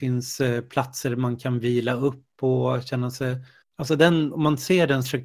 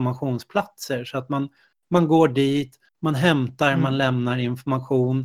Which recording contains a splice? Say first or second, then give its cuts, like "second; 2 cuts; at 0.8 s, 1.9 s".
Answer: first; 1 cut; at 3.6 s